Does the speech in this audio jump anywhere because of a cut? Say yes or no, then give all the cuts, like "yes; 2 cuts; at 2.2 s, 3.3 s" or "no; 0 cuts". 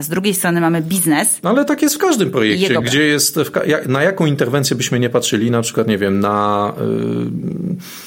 yes; 1 cut; at 2.8 s